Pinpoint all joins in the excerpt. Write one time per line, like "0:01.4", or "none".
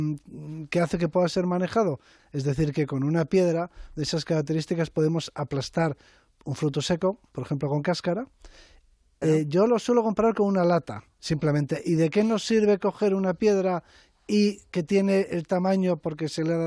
0:02.2
0:09.2
0:11.2